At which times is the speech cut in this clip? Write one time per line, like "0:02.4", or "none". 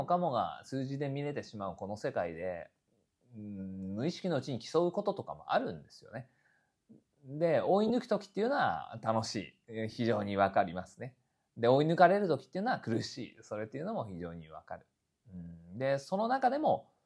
none